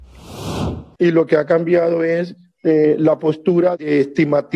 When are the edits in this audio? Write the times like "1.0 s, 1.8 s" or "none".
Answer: 1.0 s